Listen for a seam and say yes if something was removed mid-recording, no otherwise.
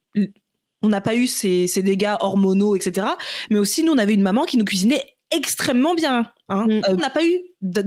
yes